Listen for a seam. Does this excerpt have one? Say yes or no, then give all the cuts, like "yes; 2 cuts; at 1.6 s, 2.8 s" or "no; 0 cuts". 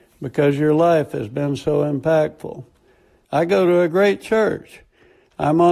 yes; 1 cut; at 3.2 s